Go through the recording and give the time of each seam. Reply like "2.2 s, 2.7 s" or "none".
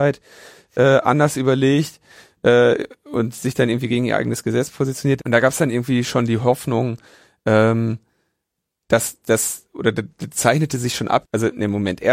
5.2 s, 11.2 s